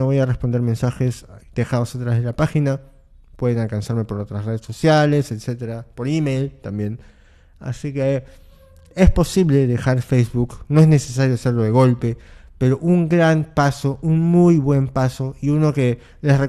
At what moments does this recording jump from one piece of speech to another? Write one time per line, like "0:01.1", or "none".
none